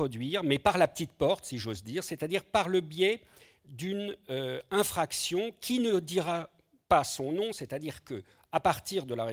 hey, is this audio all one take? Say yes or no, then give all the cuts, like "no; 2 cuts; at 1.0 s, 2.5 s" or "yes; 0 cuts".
yes; 0 cuts